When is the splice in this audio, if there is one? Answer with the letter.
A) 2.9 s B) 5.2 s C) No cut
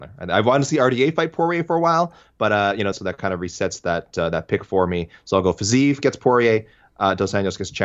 A